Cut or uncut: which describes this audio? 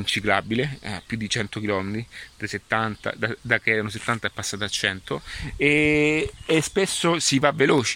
uncut